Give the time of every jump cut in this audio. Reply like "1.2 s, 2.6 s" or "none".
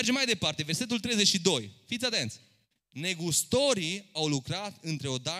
2.7 s